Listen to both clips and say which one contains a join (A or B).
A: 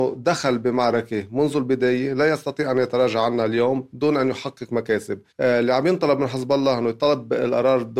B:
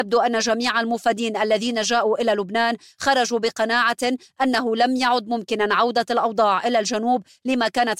A